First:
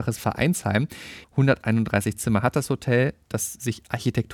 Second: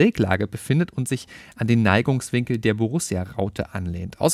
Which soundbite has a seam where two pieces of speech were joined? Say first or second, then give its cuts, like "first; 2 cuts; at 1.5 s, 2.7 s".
first; 1 cut; at 1.2 s